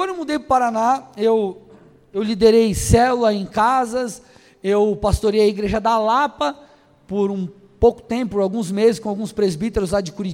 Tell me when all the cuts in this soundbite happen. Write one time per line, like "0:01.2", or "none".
none